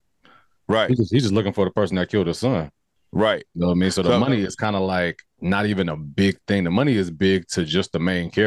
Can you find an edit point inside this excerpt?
no; 0 cuts

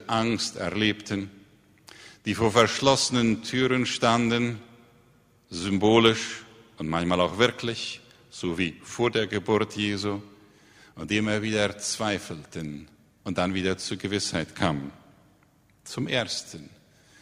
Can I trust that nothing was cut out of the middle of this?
yes; 0 cuts

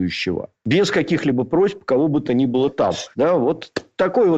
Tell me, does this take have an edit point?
yes; 1 cut; at 3.1 s

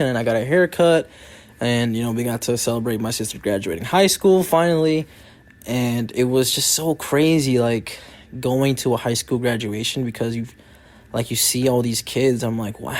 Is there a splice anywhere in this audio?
no; 0 cuts

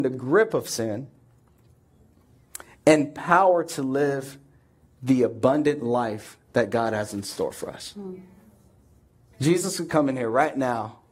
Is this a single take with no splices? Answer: no; 1 cut; at 9.3 s

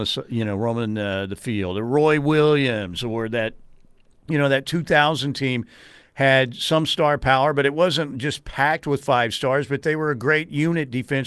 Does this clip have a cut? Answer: no; 0 cuts

